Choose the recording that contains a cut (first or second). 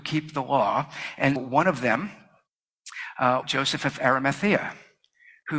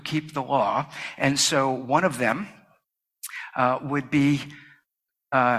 first